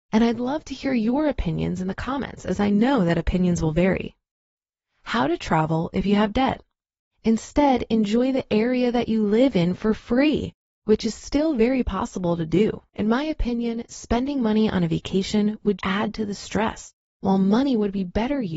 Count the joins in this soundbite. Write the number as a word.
three